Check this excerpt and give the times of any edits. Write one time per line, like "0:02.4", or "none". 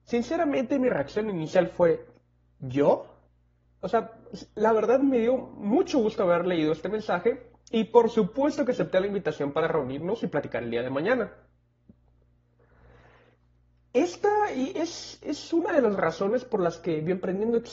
0:03.6

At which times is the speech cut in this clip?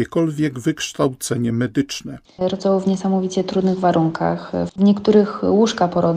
0:02.3
0:04.7

